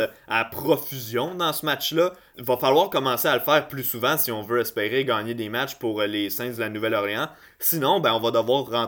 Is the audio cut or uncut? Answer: cut